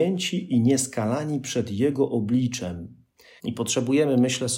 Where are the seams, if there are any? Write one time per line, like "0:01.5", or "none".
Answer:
0:03.4

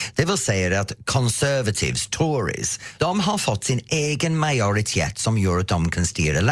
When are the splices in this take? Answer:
0:03.0

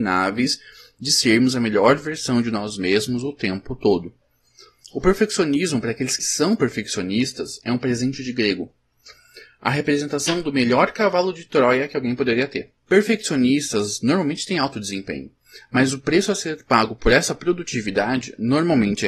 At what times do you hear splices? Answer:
0:06.2
0:12.8

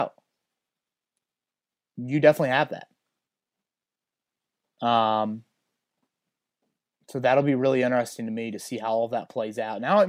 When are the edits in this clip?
none

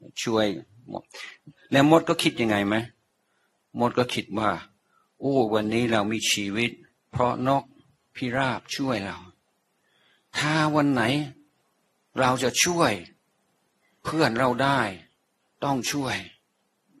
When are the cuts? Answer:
none

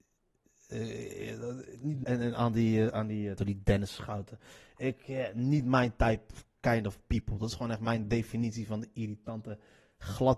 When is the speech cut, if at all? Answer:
0:02.0
0:03.4

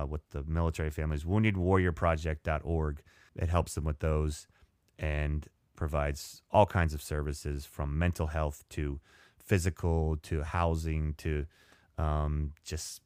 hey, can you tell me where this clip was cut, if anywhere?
0:03.3

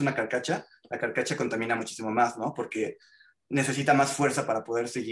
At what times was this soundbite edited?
none

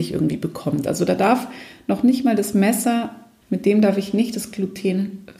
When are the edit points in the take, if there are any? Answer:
0:03.4

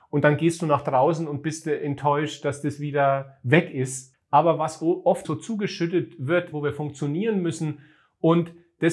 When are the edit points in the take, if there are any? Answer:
0:04.1
0:05.2
0:06.5

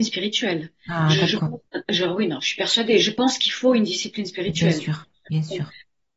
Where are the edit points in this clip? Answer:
0:01.7

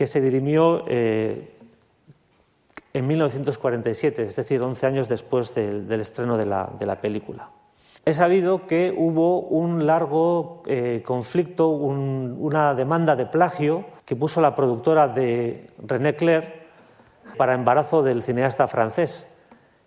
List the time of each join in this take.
0:08.0
0:14.0
0:17.3

